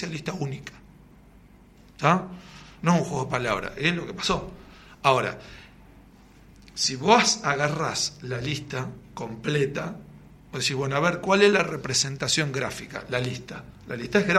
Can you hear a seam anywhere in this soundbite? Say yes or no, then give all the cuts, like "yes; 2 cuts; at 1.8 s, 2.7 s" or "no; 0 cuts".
no; 0 cuts